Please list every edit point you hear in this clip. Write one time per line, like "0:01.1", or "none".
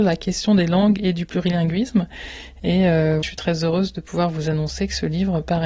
none